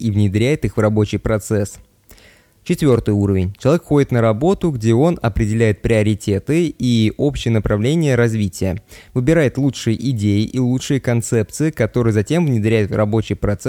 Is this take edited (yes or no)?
no